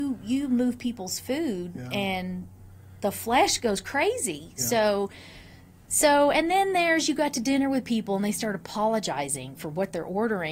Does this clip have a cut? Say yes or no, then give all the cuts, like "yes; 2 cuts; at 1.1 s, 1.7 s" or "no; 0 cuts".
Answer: no; 0 cuts